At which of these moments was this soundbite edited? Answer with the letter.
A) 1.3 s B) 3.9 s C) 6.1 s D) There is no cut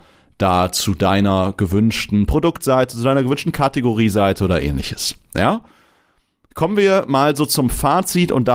D